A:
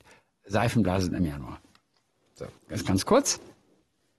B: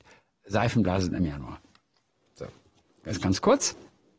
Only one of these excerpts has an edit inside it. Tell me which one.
A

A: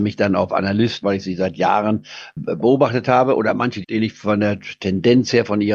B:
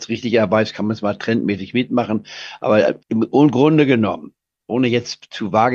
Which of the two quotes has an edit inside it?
A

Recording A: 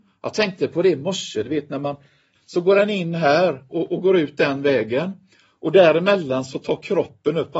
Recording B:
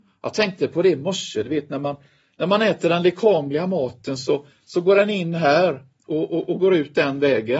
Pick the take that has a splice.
A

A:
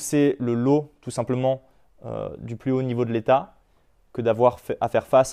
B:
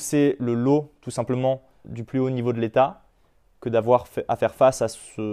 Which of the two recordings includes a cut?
B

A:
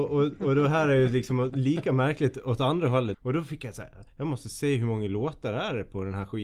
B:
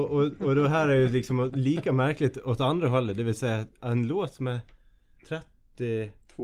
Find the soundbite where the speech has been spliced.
A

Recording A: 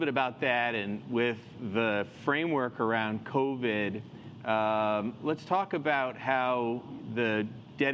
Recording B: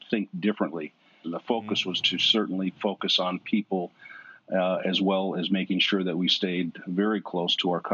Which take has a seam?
B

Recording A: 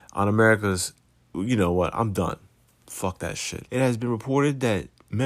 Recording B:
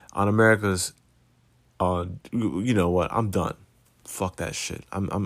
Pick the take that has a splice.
A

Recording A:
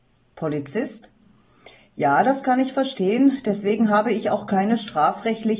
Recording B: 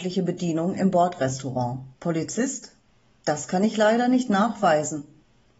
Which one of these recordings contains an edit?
B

